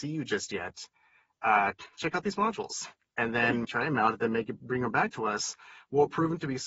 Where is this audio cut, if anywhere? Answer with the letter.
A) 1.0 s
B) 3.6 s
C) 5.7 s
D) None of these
B